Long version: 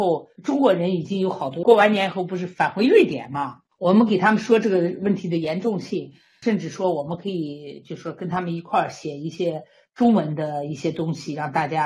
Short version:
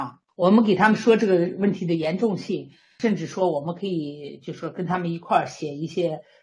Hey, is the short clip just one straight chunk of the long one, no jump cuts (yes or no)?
yes